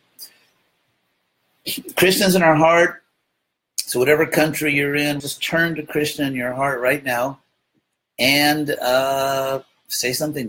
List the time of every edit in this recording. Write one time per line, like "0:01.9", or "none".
0:05.2